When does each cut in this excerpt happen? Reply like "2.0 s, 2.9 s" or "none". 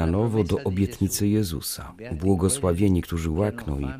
none

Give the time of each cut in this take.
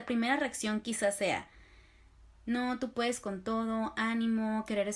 none

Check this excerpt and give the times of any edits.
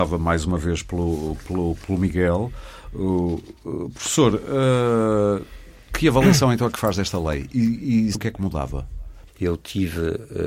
8.1 s, 9.3 s

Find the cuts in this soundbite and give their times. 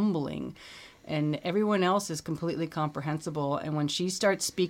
none

